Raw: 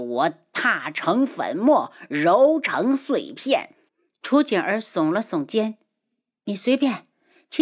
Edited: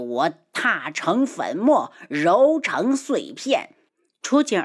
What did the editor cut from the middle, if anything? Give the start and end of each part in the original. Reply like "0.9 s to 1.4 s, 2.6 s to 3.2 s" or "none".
none